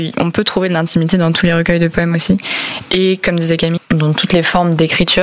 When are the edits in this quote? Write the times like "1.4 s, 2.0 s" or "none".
3.8 s